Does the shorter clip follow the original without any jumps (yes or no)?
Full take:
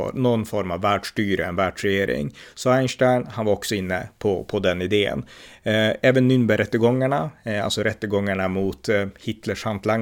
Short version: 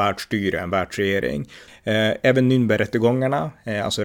no